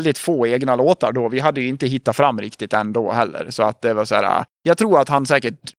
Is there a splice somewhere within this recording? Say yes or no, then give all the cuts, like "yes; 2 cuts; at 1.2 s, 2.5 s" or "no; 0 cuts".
no; 0 cuts